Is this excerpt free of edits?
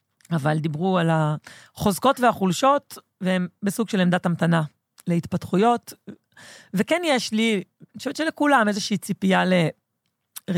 yes; 0 cuts

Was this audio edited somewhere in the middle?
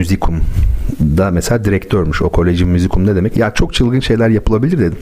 yes; 1 cut; at 3.3 s

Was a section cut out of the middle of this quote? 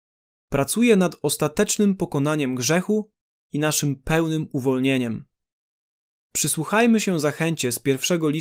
yes; 1 cut; at 6.2 s

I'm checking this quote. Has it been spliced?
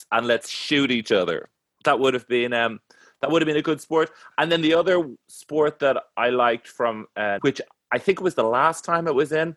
yes; 1 cut; at 7.4 s

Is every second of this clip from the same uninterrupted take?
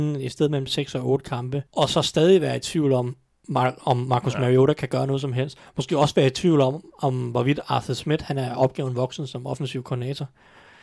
no; 1 cut; at 1.7 s

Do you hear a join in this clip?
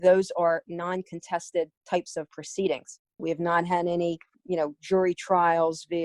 yes; 2 cuts; at 3.2 s, 4.3 s

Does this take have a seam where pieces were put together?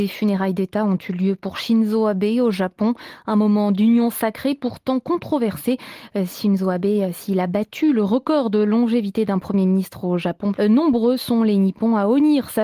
yes; 1 cut; at 10.5 s

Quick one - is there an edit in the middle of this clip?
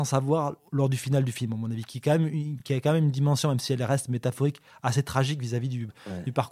no; 0 cuts

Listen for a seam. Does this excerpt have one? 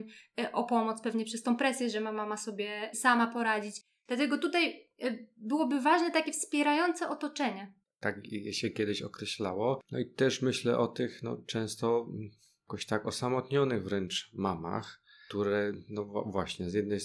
yes; 1 cut; at 7.8 s

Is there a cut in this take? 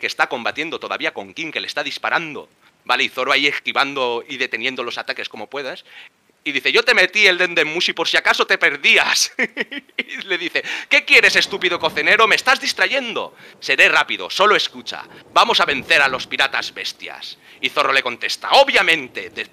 no; 0 cuts

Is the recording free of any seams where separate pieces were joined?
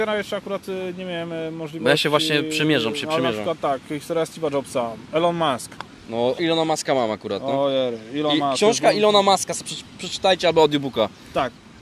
no; 1 cut; at 6.4 s

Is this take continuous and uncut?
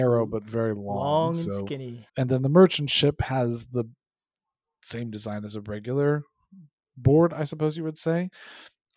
no; 1 cut; at 2.1 s

